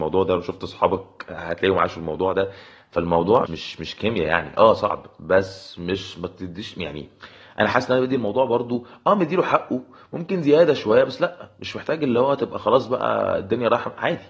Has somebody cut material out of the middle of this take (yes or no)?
yes